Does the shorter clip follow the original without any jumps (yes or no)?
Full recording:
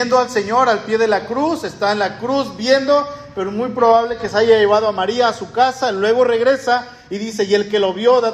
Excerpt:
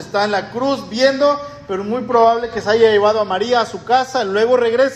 yes